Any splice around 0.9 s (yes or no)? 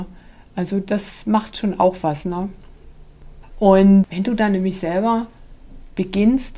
no